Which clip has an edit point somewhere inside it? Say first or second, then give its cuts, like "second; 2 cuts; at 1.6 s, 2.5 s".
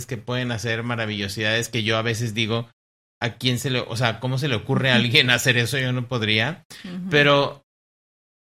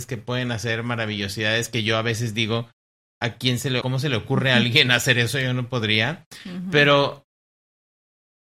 second; 1 cut; at 3.8 s